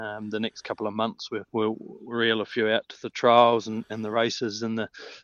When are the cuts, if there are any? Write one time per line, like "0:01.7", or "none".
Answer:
0:01.5